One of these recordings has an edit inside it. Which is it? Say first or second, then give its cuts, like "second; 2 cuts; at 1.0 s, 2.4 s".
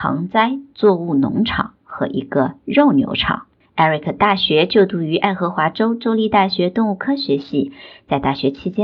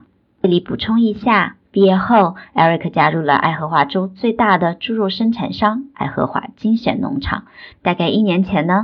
second; 2 cuts; at 1.6 s, 7.7 s